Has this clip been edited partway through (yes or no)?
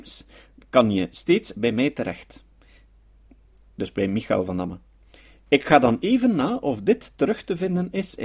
no